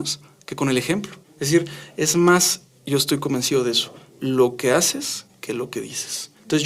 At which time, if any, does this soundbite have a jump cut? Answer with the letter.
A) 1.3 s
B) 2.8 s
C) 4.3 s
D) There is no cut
D